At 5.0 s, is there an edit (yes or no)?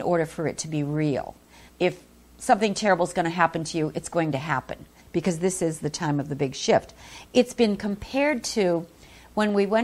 yes